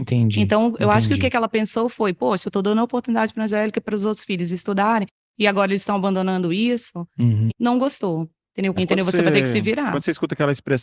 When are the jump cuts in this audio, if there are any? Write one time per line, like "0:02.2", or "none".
0:07.5
0:08.8